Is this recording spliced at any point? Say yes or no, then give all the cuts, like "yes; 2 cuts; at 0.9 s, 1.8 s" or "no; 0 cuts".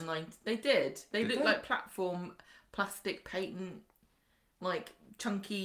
no; 0 cuts